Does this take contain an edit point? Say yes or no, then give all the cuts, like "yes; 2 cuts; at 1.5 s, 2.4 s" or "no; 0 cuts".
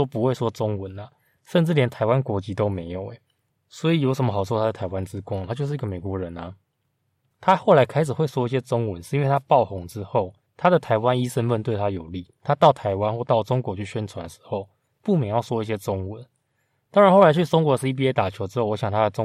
no; 0 cuts